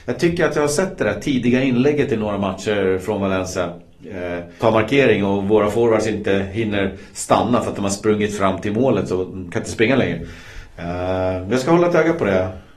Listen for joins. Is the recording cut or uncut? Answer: cut